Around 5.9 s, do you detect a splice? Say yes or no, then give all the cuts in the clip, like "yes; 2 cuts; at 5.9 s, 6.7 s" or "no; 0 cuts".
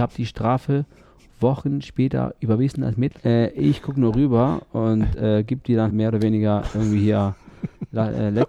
yes; 2 cuts; at 3.2 s, 5.9 s